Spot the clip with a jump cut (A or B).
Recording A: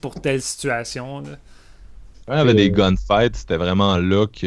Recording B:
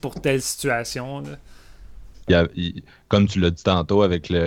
B